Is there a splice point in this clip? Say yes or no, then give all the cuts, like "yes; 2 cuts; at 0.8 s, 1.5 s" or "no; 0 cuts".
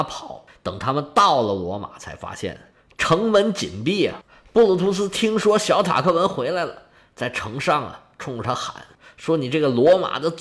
no; 0 cuts